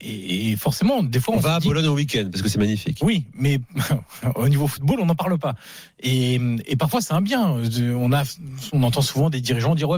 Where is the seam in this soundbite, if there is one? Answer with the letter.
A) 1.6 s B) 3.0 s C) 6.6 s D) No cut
D